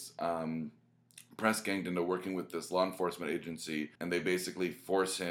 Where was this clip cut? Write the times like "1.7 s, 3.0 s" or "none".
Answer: 4.0 s